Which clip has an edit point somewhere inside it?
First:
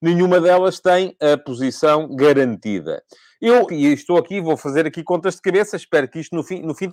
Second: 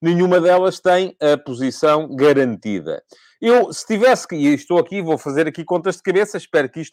first; 1 cut; at 3.7 s

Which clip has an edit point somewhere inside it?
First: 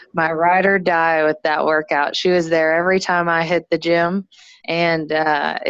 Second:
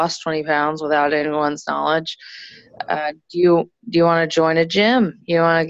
first; 1 cut; at 4.6 s

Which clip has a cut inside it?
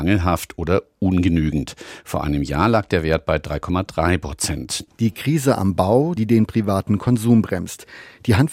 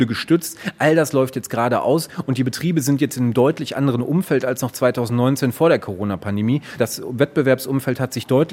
first; 2 cuts; at 4.9 s, 6.2 s

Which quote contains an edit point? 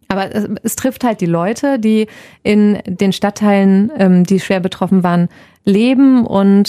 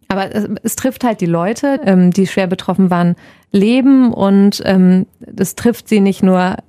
second; 1 cut; at 1.8 s

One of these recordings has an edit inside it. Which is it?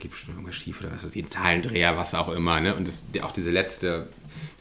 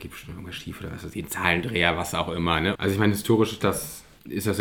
second; 1 cut; at 2.8 s

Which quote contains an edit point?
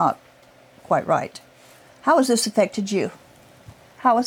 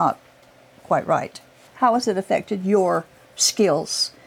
second; 1 cut; at 1.7 s

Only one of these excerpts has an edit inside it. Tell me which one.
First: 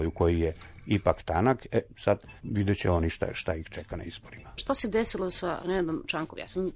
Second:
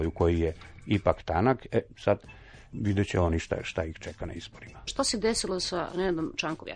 first; 1 cut; at 2.4 s

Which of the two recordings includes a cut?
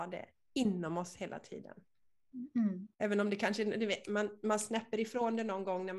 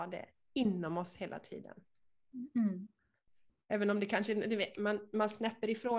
first; 1 cut; at 2.9 s

